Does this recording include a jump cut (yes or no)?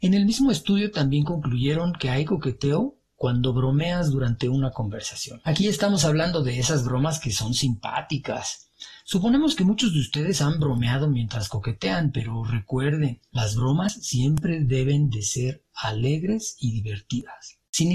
no